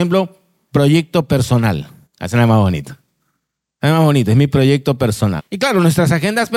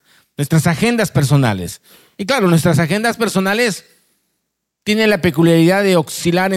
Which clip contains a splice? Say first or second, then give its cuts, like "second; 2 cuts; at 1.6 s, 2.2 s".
first; 2 cuts; at 2.0 s, 5.4 s